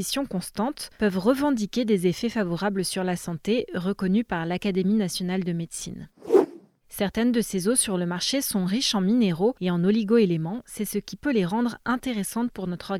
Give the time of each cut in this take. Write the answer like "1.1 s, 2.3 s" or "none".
none